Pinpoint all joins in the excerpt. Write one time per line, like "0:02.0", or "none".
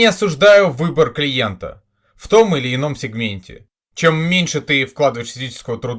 0:03.8